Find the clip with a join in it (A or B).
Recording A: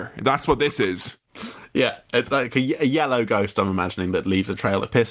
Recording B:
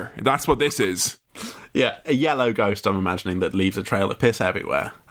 B